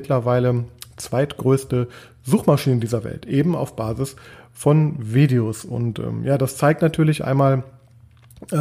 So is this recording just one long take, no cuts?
yes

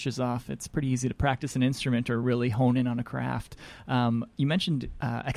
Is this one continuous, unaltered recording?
yes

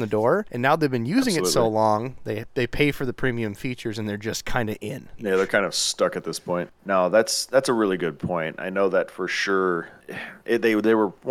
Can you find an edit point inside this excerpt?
yes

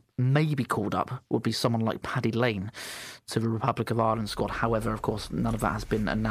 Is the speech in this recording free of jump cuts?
yes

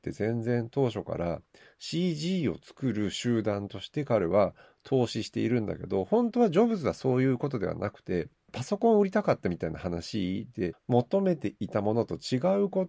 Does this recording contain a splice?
yes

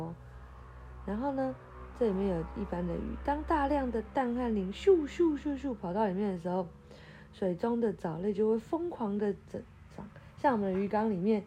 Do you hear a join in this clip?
yes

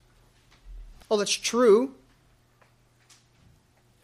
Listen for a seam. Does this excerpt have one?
yes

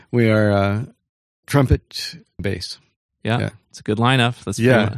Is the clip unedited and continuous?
no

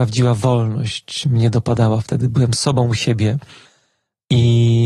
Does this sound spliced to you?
no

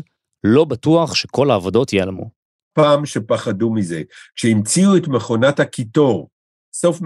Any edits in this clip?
no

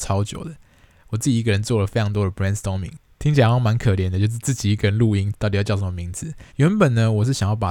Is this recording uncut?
no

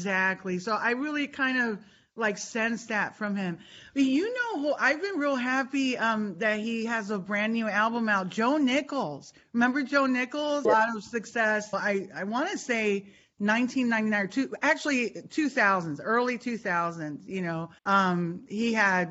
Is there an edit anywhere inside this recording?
yes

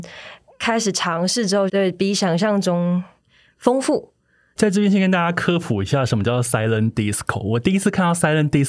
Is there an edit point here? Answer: yes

